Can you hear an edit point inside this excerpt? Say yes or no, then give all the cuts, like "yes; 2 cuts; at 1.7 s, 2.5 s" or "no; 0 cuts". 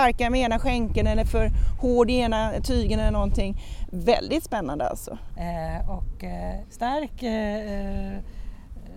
yes; 2 cuts; at 5.3 s, 6.6 s